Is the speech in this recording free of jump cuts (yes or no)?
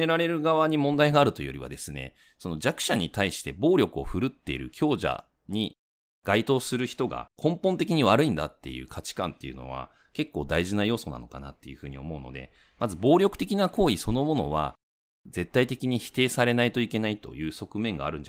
no